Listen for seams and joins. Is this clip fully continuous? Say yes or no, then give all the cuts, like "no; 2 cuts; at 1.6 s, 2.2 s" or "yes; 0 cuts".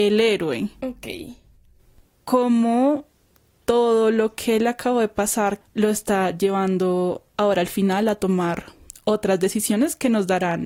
no; 1 cut; at 5.6 s